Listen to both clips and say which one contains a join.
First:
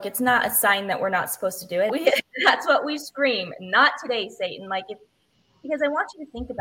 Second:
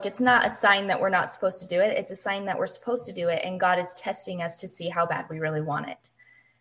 first; 1 cut; at 1.9 s

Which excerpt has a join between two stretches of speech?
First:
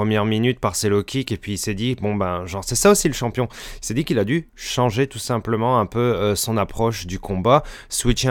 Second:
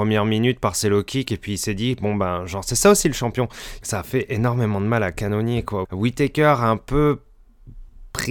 second; 2 cuts; at 3.8 s, 5.8 s

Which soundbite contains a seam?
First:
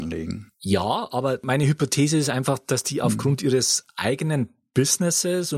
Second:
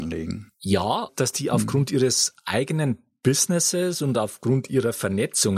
second; 1 cut; at 1.1 s

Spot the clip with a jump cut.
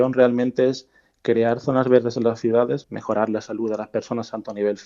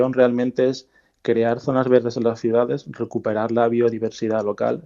first; 1 cut; at 2.8 s

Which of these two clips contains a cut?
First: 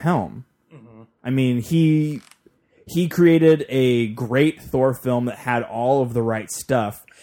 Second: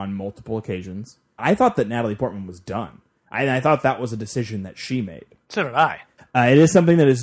second; 2 cuts; at 1.4 s, 6.2 s

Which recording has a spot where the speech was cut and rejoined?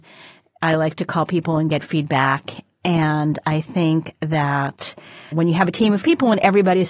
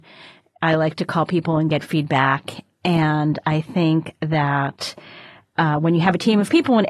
first; 1 cut; at 5.3 s

